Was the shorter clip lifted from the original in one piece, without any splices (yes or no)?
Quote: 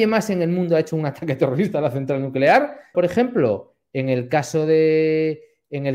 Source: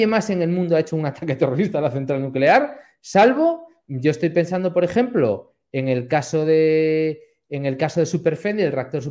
no